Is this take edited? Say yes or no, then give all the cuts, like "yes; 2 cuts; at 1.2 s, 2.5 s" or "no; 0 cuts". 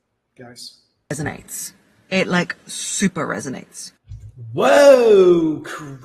no; 0 cuts